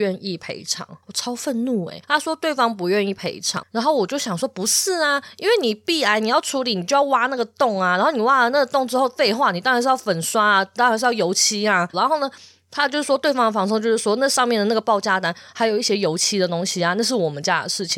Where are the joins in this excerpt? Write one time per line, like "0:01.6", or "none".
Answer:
0:01.0
0:03.6
0:11.9